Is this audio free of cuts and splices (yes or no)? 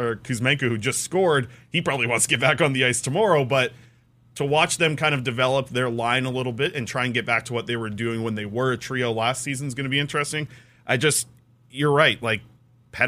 yes